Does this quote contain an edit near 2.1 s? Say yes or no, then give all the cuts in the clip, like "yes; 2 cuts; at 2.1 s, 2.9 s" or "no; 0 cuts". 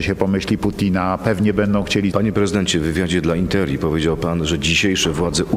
yes; 1 cut; at 2.1 s